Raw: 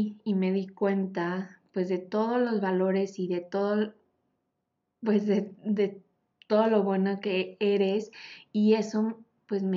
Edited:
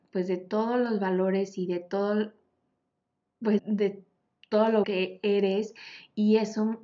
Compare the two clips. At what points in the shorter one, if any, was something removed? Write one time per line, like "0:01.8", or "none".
0:03.6
0:04.8